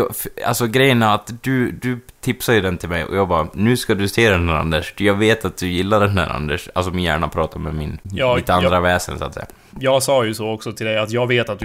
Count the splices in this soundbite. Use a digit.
1